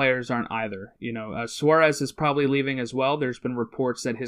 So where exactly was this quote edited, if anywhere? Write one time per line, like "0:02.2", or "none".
none